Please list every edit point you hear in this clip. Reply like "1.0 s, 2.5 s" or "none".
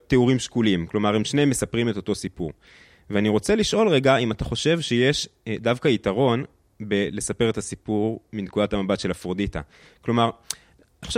none